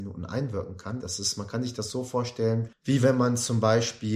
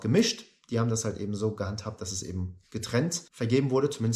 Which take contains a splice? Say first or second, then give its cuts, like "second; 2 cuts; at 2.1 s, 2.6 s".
first; 1 cut; at 1.0 s